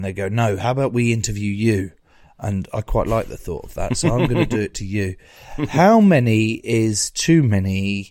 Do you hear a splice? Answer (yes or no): no